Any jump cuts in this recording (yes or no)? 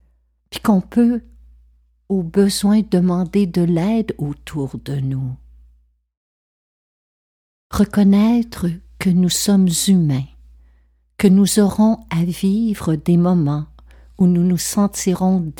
no